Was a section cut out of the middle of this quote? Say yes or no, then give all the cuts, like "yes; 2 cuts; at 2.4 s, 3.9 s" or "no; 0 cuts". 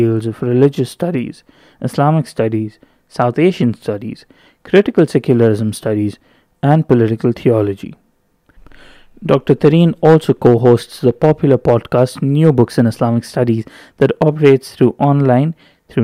no; 0 cuts